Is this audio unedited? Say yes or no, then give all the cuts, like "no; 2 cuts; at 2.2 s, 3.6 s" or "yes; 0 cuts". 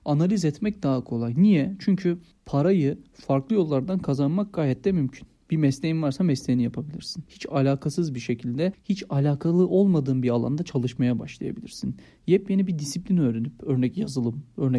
yes; 0 cuts